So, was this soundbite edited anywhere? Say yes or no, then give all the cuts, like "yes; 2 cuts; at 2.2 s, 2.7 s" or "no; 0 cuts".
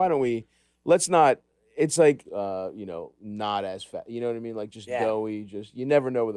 yes; 1 cut; at 2.2 s